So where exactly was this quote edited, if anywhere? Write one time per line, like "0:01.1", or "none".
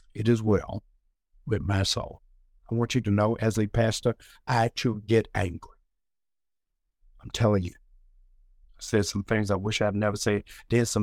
none

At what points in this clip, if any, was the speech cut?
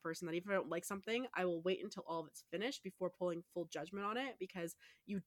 none

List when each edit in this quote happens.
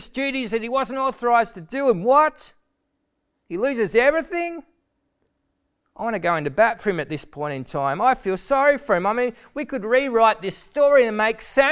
none

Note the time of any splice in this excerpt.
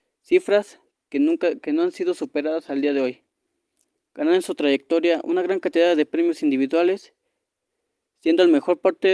none

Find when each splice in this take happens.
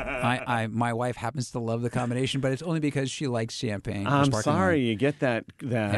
none

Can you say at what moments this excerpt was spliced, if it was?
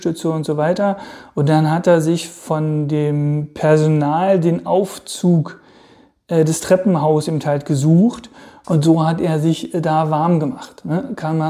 0:08.6

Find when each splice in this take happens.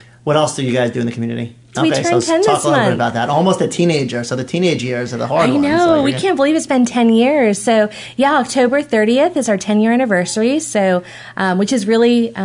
0:01.7

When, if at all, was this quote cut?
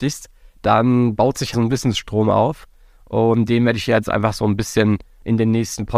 0:01.5

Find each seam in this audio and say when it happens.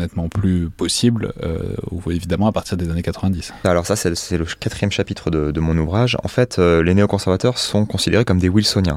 0:03.6

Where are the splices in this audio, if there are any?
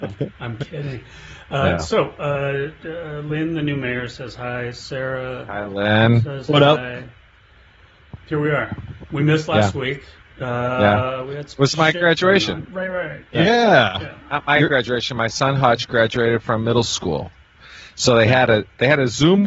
0:08.2

